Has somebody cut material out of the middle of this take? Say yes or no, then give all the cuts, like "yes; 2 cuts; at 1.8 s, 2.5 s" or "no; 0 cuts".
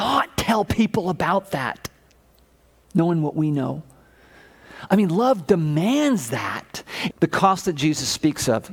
yes; 1 cut; at 7.1 s